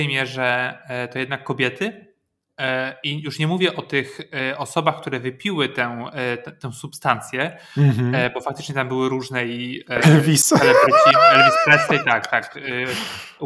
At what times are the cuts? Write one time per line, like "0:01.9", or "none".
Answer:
none